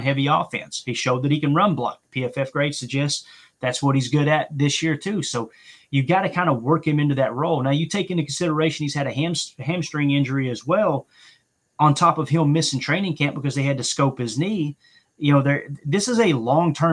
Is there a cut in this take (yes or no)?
no